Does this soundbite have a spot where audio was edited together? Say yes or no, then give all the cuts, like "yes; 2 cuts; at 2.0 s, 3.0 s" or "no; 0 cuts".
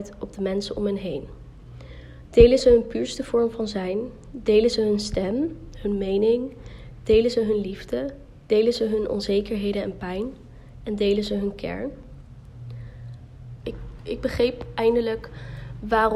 yes; 1 cut; at 13.6 s